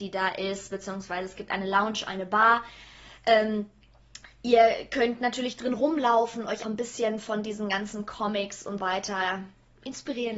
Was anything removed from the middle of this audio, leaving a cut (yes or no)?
yes